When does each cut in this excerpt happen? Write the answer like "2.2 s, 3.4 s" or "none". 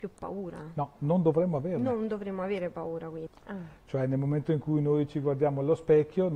3.3 s